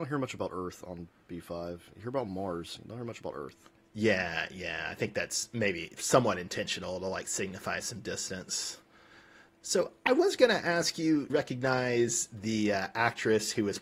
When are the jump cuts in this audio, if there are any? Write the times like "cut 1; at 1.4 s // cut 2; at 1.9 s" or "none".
cut 1; at 11.3 s